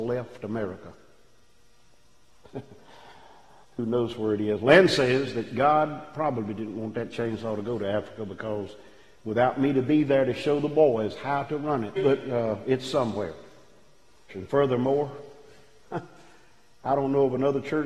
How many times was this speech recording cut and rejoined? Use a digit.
2